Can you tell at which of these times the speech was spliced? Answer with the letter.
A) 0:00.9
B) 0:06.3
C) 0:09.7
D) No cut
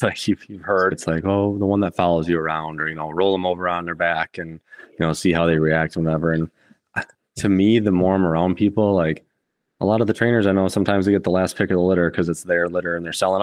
A